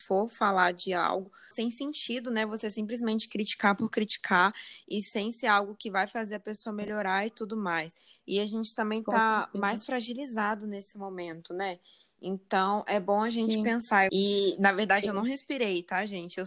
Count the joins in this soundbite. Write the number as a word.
two